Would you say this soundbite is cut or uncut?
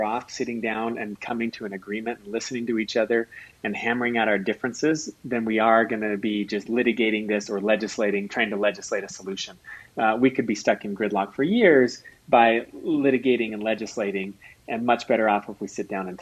uncut